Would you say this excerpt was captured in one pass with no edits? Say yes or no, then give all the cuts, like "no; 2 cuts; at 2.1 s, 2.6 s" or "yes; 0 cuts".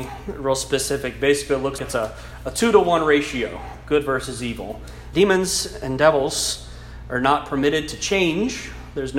no; 2 cuts; at 1.8 s, 5.1 s